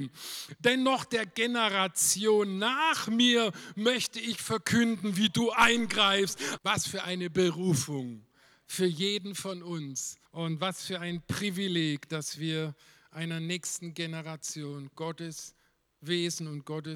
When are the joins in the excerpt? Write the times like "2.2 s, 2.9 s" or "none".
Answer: 6.6 s, 10.3 s